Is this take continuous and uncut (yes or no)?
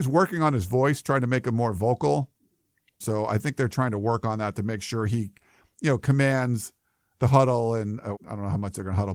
no